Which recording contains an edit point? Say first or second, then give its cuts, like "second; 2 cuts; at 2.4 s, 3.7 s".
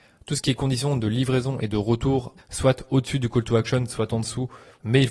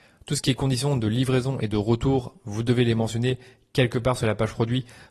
first; 1 cut; at 2.4 s